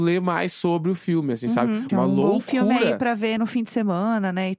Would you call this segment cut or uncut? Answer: cut